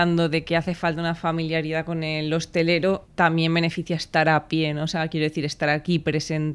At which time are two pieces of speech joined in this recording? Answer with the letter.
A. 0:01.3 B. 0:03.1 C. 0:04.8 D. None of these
B